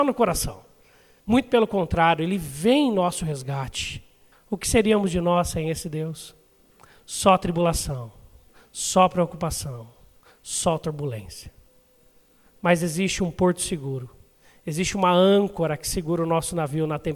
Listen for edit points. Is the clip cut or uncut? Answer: cut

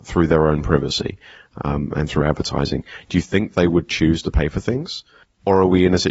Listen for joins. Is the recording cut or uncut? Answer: uncut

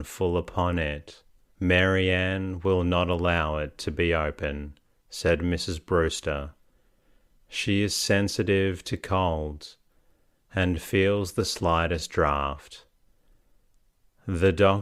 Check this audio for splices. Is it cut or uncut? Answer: cut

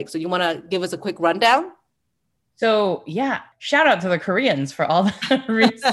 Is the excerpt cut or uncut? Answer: uncut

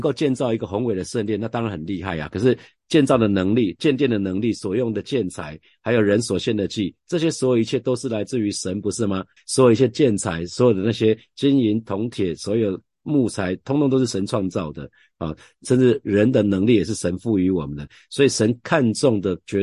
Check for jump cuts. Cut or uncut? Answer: cut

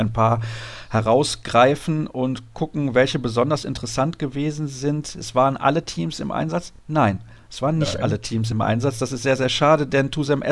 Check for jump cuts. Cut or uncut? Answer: uncut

